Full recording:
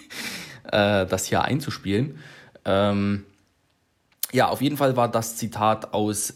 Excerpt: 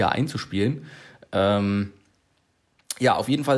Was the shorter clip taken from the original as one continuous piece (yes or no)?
yes